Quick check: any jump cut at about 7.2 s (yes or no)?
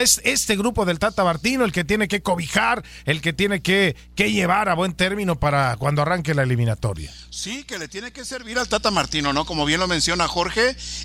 no